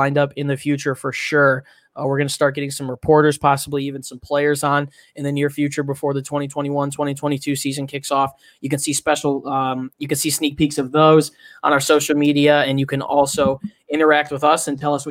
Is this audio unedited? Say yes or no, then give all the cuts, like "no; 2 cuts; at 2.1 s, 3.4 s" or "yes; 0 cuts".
yes; 0 cuts